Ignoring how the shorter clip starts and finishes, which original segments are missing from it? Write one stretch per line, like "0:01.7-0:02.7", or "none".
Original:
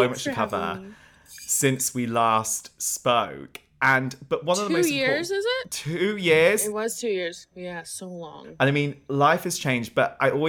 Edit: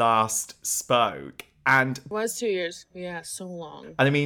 0:04.3-0:06.7